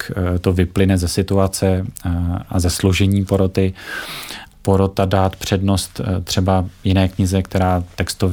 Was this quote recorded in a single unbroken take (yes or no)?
no